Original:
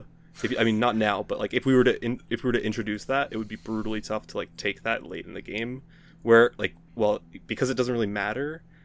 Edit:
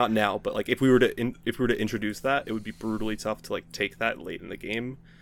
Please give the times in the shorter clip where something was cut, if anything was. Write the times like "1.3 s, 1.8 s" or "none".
none